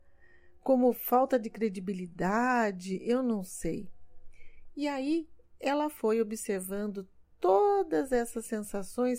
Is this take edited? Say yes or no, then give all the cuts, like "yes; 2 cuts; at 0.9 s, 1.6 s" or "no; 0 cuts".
no; 0 cuts